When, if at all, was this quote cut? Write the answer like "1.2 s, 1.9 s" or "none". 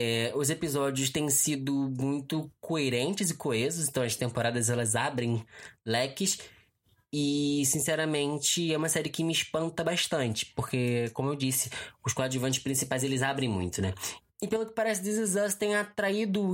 14.2 s